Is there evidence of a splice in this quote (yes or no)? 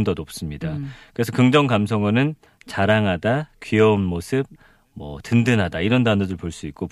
yes